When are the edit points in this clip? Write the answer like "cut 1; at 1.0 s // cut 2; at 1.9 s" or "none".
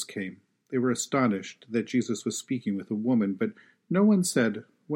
none